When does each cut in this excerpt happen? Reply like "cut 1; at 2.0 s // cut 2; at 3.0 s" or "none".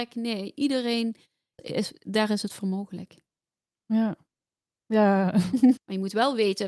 cut 1; at 1.6 s // cut 2; at 5.8 s